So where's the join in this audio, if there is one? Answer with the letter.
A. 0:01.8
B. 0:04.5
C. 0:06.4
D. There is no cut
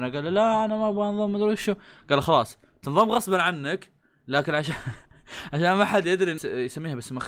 C